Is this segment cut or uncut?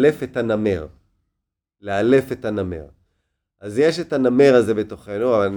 uncut